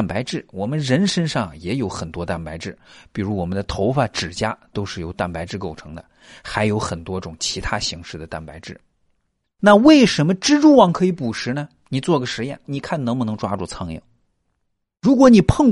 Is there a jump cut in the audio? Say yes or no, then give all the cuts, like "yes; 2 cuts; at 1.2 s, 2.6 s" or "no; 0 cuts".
yes; 2 cuts; at 9.4 s, 12.6 s